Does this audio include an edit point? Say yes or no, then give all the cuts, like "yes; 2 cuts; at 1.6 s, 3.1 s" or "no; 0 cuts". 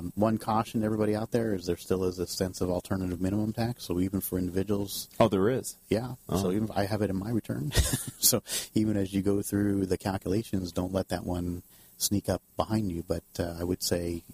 no; 0 cuts